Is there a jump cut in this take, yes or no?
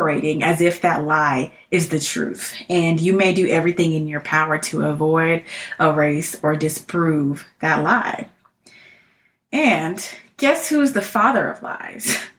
no